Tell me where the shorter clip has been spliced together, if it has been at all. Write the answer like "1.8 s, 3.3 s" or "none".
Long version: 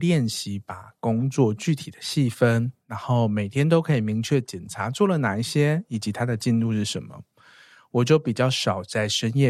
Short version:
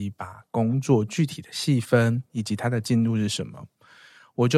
2.3 s